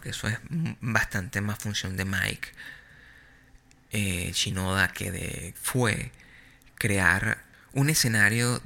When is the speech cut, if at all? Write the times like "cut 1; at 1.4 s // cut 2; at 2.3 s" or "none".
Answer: cut 1; at 5.5 s